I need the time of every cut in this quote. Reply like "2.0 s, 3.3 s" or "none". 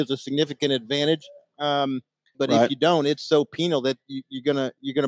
2.3 s